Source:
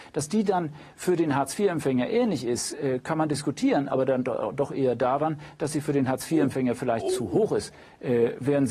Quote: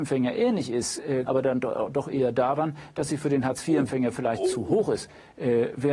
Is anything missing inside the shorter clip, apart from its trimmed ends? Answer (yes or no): yes